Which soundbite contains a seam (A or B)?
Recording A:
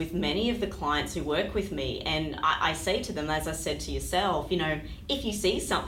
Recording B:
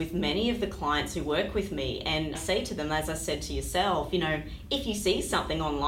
B